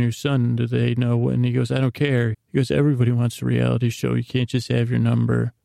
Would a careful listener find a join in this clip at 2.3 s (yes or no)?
yes